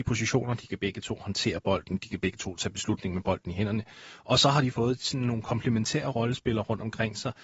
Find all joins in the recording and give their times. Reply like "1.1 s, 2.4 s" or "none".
none